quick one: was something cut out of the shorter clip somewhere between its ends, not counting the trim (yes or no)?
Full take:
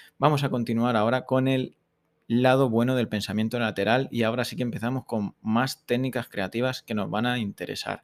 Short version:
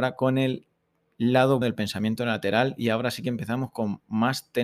yes